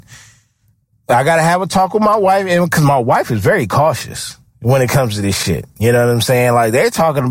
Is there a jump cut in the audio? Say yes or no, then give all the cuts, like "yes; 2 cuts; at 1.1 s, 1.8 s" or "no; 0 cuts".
no; 0 cuts